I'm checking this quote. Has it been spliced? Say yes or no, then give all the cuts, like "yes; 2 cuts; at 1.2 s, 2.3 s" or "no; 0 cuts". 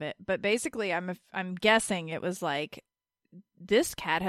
no; 0 cuts